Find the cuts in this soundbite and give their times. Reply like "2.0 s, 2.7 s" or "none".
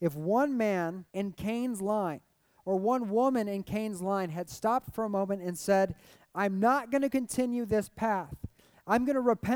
1.1 s